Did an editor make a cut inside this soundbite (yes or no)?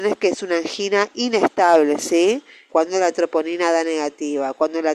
yes